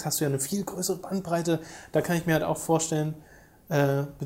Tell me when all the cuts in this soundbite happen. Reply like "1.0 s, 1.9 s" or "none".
none